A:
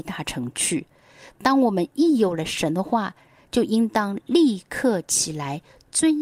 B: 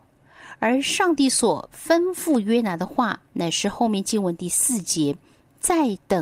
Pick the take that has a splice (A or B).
B